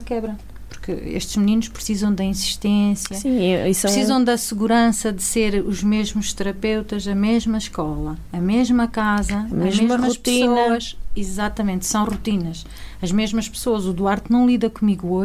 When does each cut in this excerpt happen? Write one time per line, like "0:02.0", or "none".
none